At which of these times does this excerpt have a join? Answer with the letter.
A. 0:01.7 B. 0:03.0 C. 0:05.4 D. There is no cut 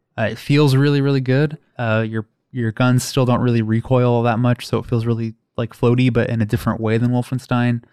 A